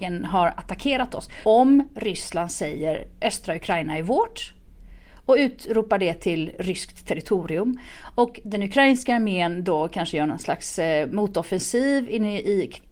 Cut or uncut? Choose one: cut